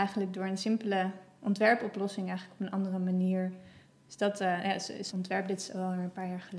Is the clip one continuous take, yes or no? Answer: no